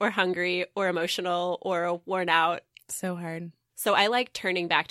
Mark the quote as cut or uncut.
uncut